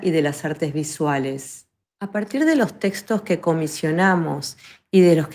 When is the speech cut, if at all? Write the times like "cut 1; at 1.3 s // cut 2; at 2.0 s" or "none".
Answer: cut 1; at 1.8 s